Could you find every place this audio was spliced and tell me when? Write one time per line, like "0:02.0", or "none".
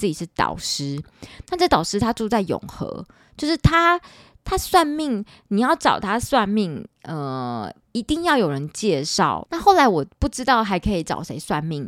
0:09.4

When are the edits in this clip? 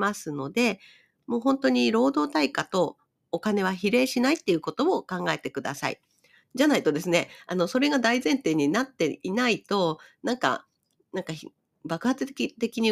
0:06.4

